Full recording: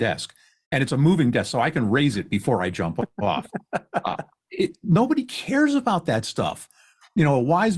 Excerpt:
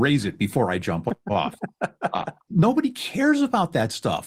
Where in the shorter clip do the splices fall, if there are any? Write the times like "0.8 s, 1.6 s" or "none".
2.5 s